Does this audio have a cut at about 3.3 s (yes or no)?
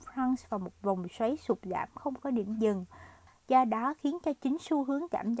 yes